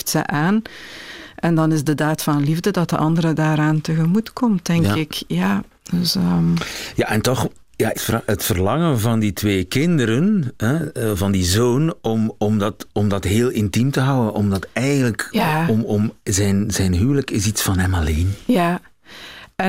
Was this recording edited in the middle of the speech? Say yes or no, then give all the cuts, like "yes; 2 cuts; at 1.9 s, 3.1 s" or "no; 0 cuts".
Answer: yes; 1 cut; at 7.9 s